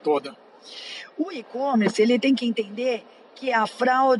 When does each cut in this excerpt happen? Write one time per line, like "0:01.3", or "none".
none